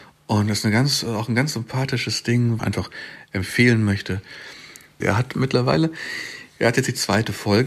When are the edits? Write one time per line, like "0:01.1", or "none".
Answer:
0:02.6
0:05.0